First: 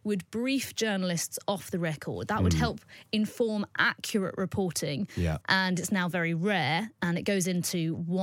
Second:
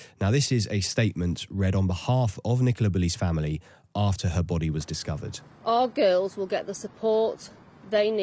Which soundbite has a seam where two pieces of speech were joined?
first; 1 cut; at 5.4 s

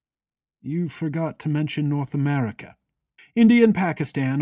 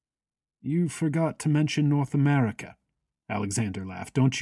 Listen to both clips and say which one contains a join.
first; 1 cut; at 3.2 s

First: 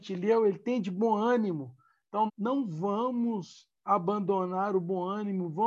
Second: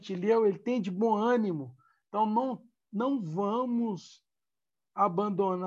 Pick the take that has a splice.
first; 2 cuts; at 2.3 s, 3.8 s

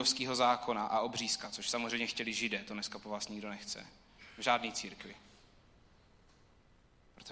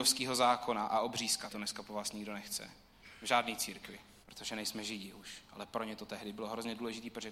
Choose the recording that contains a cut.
second; 2 cuts; at 1.5 s, 4.2 s

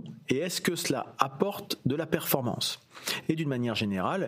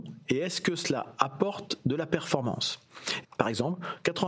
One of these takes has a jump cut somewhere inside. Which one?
second; 1 cut; at 3.2 s

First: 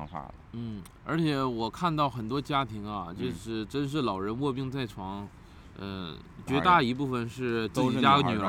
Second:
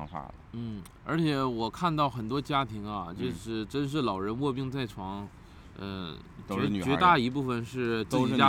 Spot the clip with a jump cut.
first; 1 cut; at 6.5 s

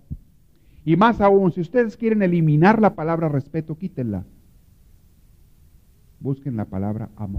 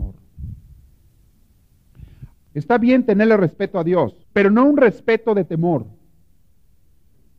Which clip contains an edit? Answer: second; 2 cuts; at 2.3 s, 4.2 s

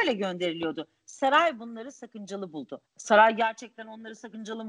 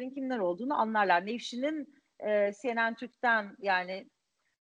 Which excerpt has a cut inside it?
first; 1 cut; at 2.9 s

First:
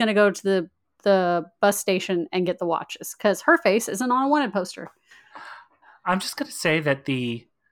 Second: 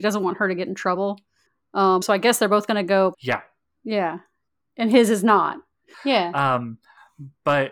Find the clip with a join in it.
second; 3 cuts; at 2.0 s, 3.1 s, 5.9 s

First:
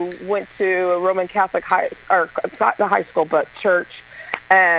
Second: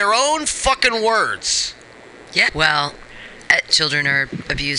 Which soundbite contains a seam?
second; 2 cuts; at 2.5 s, 3.7 s

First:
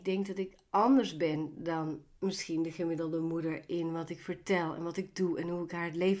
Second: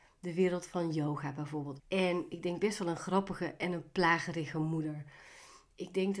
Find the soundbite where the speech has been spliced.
second; 1 cut; at 1.8 s

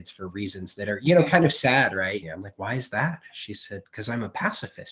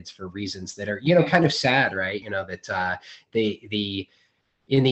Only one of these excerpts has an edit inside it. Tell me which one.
first; 1 cut; at 2.2 s

